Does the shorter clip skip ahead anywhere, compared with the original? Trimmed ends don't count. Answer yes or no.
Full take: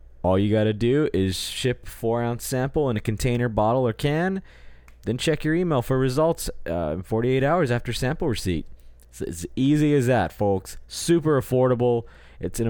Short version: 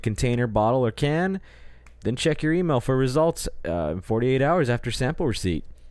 no